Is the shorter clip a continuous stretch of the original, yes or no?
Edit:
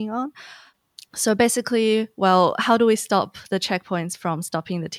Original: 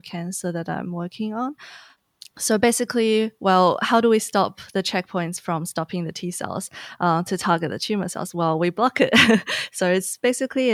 yes